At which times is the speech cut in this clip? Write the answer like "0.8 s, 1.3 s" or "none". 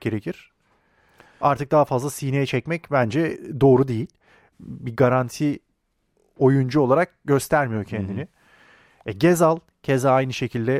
4.5 s

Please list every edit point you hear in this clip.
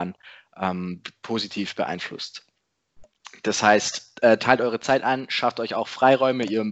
none

